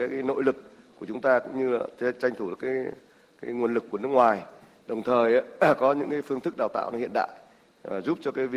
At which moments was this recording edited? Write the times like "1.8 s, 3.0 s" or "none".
none